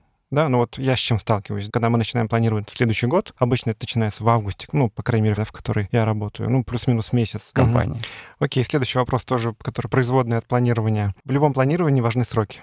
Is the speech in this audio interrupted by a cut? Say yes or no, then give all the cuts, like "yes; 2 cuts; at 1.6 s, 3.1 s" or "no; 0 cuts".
yes; 2 cuts; at 5.4 s, 7.5 s